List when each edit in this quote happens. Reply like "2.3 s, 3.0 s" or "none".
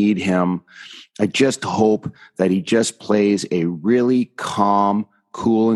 none